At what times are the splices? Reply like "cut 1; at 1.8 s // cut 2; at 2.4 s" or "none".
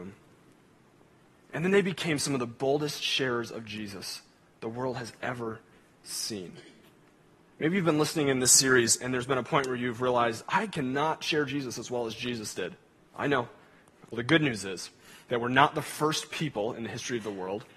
cut 1; at 14.1 s